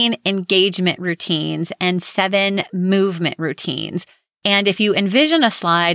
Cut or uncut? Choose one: uncut